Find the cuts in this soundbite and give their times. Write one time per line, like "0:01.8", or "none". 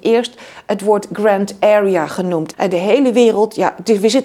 0:02.5